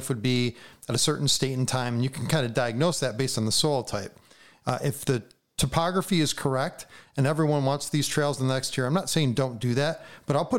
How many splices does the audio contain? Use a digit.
1